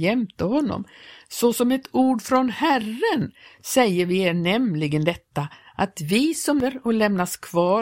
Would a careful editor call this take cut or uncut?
uncut